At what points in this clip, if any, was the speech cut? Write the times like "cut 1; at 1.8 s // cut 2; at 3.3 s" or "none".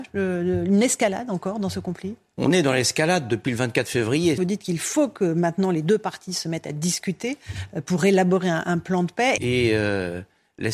cut 1; at 4.4 s // cut 2; at 9.4 s